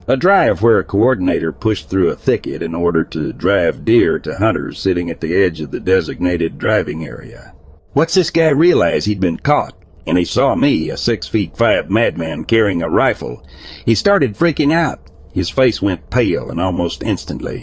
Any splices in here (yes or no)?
yes